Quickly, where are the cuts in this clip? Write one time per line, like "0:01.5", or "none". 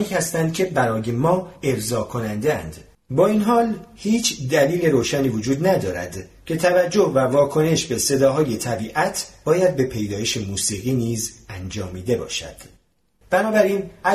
0:02.9
0:13.2